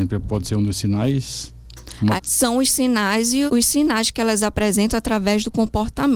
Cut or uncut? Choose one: cut